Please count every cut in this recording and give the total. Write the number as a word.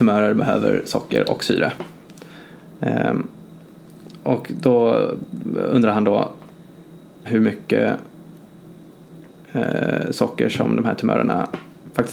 one